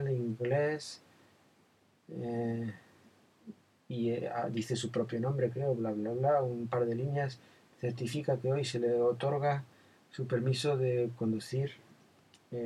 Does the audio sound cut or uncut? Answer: uncut